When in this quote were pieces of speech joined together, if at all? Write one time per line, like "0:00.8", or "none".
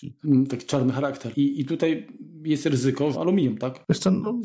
0:01.3
0:03.1